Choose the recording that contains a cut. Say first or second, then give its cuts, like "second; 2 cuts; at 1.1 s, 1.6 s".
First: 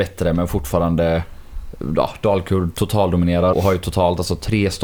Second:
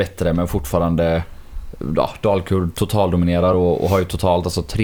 first; 1 cut; at 3.5 s